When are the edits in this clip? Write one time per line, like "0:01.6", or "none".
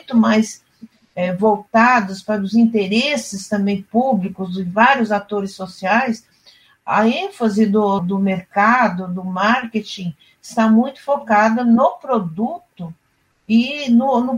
0:08.0